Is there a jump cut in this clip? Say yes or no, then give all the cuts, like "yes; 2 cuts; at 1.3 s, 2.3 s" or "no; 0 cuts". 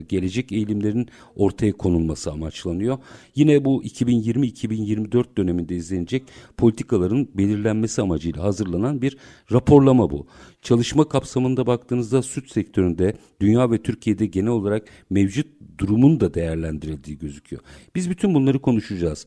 no; 0 cuts